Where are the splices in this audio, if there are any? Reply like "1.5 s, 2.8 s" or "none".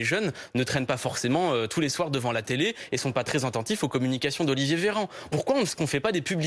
5.3 s